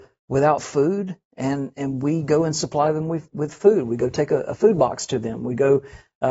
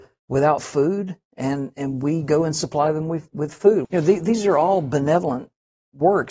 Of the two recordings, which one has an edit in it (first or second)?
second